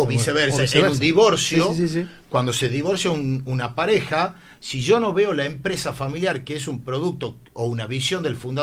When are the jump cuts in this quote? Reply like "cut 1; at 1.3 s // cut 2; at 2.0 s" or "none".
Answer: none